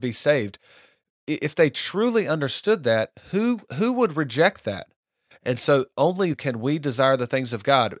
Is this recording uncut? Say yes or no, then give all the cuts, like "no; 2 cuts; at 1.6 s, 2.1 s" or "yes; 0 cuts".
no; 2 cuts; at 5.3 s, 6.3 s